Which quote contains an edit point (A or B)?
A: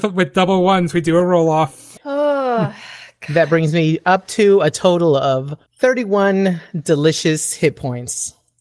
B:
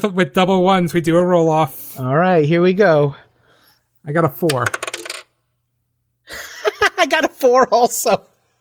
A